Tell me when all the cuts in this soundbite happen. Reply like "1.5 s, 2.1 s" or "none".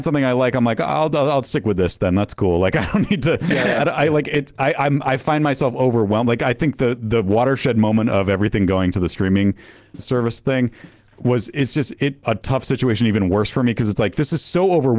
10.0 s, 12.2 s